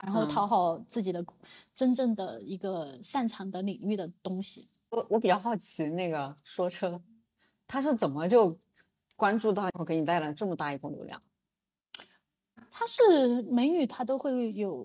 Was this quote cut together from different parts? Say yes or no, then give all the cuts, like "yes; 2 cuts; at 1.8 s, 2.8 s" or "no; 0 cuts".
no; 0 cuts